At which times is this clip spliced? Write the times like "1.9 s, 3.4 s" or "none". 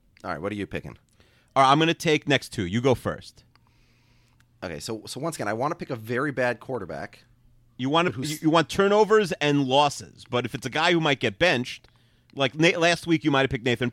none